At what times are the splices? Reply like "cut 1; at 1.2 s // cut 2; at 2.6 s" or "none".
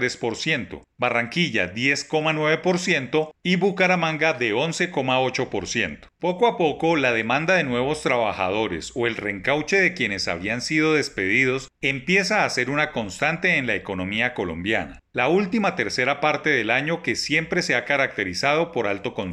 cut 1; at 6.1 s // cut 2; at 15.1 s